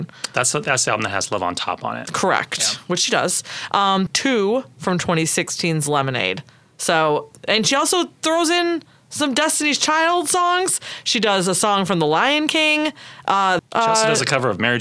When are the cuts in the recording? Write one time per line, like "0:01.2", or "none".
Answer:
0:04.1
0:13.6